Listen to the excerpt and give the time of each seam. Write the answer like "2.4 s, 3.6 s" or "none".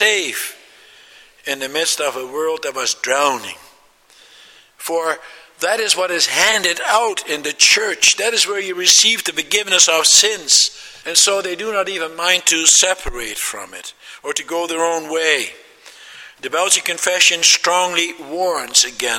11.0 s